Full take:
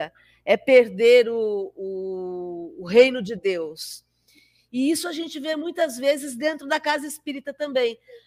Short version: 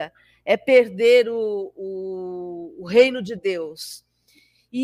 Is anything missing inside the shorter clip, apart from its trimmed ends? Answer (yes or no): no